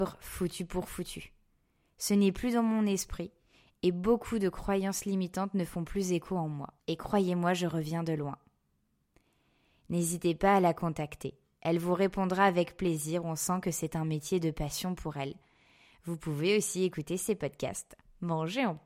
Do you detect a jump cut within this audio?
yes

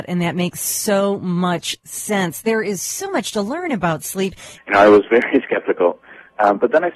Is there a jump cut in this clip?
yes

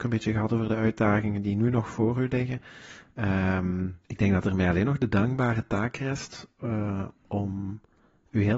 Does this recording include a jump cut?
yes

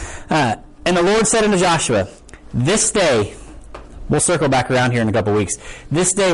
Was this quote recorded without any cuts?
yes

